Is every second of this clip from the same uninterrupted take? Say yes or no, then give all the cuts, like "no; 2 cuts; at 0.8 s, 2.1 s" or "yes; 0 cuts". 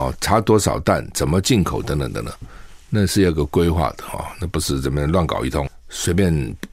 yes; 0 cuts